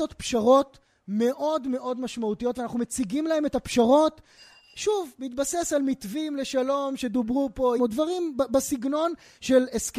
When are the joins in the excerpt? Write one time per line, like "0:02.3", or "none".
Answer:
0:07.8